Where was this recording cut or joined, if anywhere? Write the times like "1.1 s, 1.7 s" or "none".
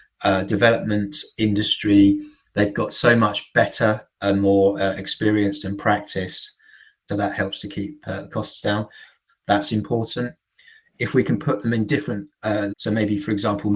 7.1 s, 9.3 s, 12.7 s